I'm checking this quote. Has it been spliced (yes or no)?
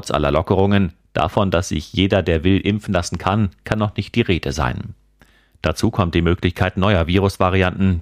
no